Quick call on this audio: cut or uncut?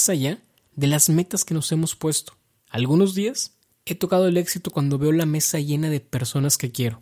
cut